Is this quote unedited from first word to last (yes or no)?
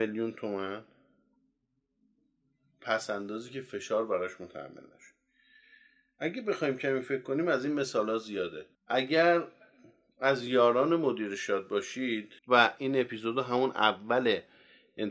no